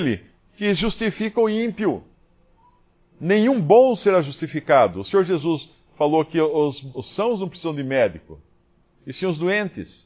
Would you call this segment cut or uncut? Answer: cut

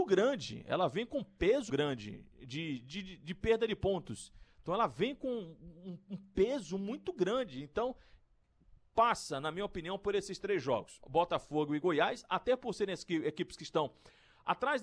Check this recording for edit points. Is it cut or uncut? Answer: cut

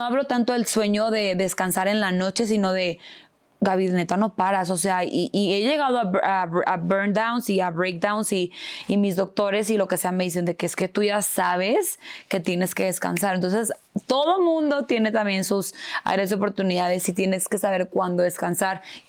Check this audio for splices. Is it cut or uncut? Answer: uncut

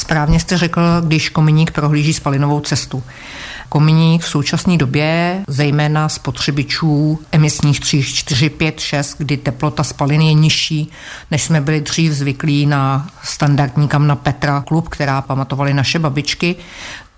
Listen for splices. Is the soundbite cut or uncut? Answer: uncut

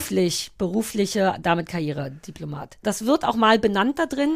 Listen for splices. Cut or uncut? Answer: cut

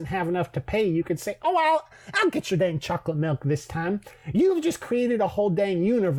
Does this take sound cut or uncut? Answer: uncut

